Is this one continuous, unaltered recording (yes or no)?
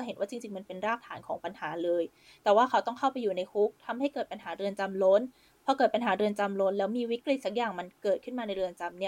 yes